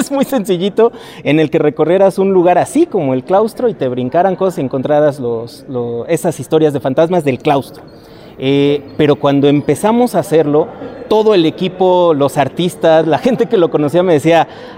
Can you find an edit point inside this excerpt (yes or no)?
no